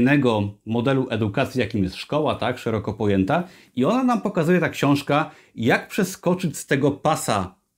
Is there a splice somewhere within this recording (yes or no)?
no